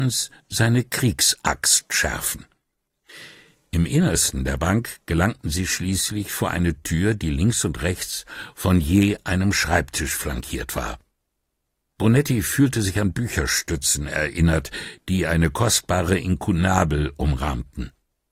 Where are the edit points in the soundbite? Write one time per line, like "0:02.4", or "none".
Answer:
none